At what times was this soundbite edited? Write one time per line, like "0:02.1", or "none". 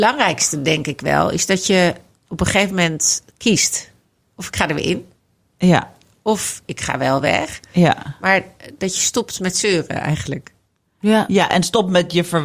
none